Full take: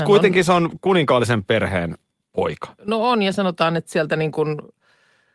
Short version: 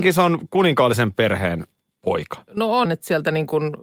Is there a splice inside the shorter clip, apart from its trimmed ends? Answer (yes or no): yes